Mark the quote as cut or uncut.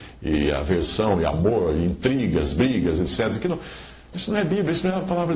cut